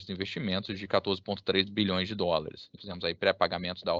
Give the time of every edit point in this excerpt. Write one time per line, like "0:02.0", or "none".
0:02.8